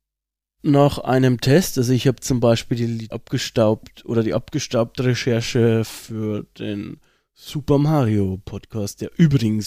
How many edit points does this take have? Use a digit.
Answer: 1